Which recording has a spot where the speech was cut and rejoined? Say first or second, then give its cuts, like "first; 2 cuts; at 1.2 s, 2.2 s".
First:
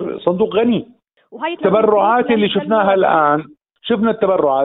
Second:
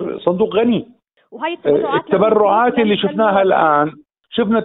first; 1 cut; at 1.6 s